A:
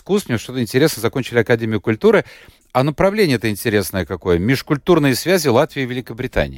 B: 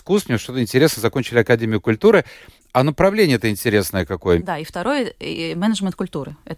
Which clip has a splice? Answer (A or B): B